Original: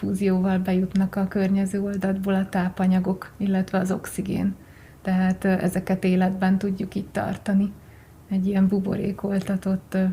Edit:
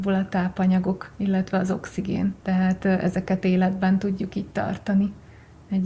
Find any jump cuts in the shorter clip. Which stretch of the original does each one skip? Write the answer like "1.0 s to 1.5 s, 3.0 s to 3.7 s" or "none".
4.6 s to 5.0 s